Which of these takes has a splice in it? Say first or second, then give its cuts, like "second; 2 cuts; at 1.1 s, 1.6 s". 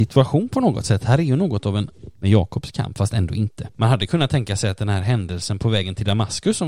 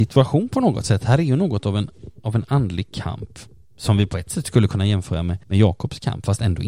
first; 2 cuts; at 2.2 s, 3.7 s